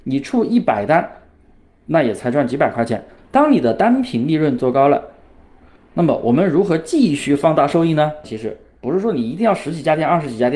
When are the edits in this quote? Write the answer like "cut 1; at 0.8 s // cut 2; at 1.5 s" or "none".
cut 1; at 3.2 s // cut 2; at 8.2 s